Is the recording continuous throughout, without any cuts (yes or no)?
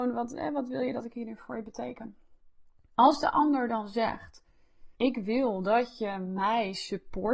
no